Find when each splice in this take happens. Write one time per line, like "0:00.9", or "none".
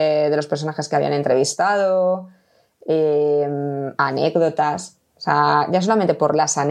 none

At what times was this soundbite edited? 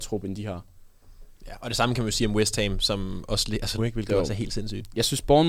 0:03.8

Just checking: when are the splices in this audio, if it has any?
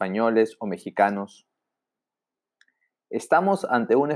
none

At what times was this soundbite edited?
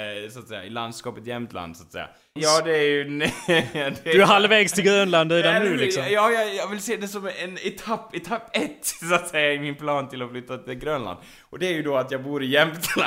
0:02.4

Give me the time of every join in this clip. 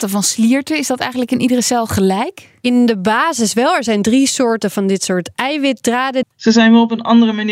0:06.2

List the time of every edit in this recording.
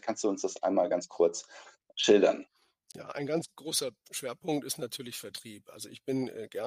none

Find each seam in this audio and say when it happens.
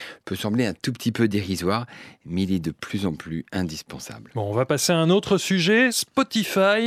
none

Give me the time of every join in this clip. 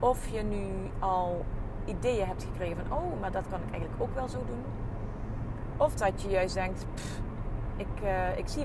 none

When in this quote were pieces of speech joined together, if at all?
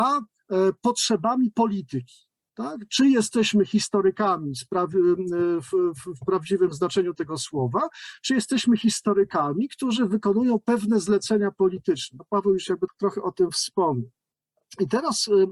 0:12.9

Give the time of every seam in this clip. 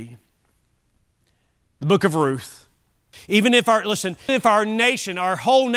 0:03.1
0:04.3

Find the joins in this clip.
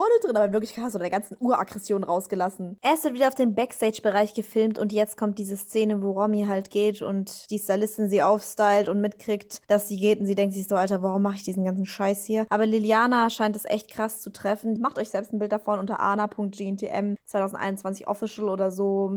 0:14.8

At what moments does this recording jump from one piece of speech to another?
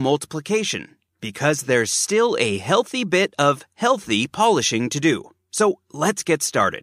none

